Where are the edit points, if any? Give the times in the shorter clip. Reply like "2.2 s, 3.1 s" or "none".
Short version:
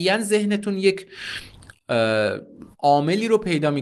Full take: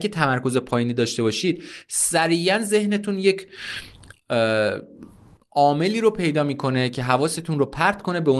2.7 s